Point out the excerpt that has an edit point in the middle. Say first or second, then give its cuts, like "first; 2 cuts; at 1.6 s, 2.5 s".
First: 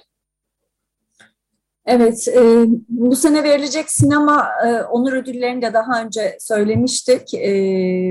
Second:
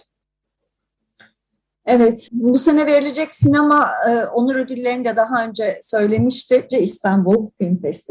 second; 2 cuts; at 2.3 s, 6.7 s